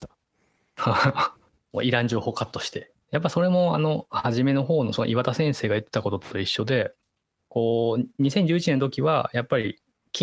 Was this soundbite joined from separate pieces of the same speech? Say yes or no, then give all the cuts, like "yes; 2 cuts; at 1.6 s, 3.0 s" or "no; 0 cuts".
yes; 1 cut; at 2.9 s